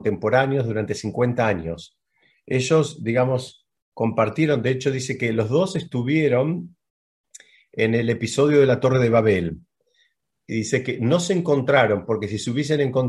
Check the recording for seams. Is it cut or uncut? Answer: uncut